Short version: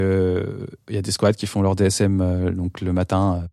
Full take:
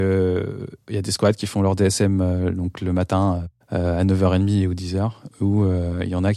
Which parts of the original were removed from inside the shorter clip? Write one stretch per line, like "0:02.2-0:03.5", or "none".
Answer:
none